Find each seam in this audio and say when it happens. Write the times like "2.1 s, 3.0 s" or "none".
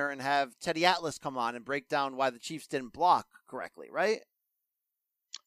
none

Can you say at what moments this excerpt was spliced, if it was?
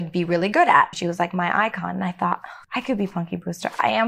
0.9 s, 2.6 s

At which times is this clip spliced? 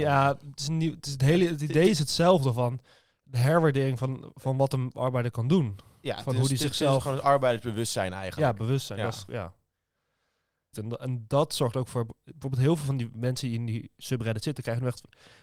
10.7 s

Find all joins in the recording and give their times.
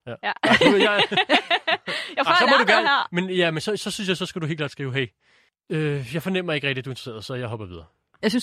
none

